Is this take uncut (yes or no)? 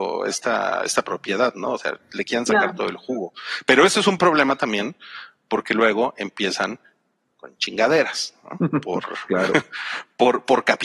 yes